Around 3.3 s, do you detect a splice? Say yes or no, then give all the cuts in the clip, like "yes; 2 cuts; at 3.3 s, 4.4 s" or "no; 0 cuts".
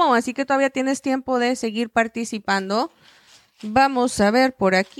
no; 0 cuts